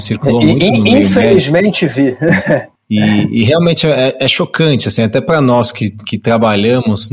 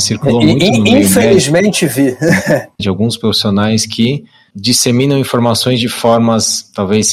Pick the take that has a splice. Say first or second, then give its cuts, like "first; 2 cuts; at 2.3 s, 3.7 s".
second; 1 cut; at 2.8 s